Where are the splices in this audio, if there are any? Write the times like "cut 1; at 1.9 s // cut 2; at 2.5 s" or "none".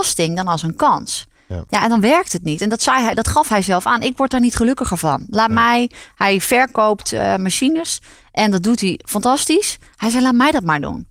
none